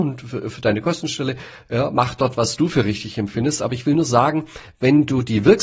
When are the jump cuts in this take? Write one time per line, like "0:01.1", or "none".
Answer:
none